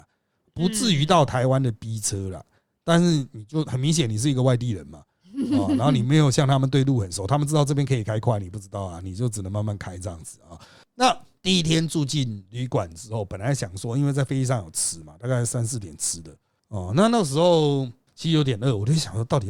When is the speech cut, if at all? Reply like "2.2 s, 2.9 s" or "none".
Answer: none